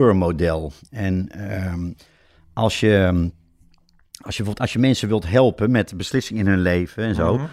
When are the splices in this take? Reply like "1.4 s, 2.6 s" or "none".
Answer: none